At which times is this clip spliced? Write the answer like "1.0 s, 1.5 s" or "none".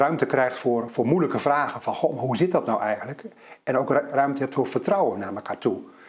none